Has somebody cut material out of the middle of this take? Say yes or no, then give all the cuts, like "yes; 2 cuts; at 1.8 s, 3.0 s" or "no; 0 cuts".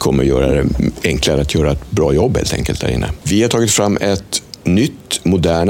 yes; 1 cut; at 3.2 s